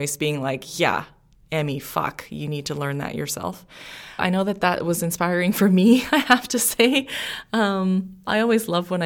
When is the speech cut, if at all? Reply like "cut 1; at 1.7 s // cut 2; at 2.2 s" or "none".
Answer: cut 1; at 4.2 s